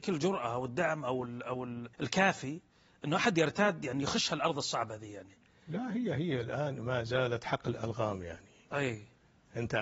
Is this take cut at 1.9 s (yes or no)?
yes